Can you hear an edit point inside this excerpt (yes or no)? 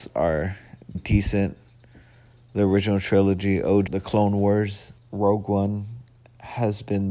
yes